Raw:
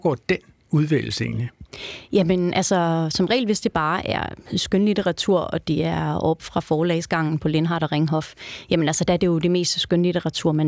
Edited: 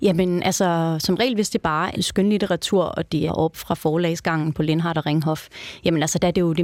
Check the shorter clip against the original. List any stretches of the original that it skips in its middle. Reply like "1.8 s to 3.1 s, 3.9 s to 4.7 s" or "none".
4.0 s to 4.5 s, 5.8 s to 6.1 s